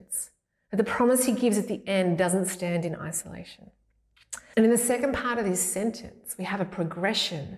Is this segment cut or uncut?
cut